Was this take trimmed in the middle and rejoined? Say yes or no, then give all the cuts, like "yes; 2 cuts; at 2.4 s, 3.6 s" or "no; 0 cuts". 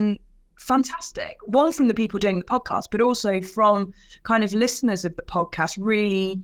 no; 0 cuts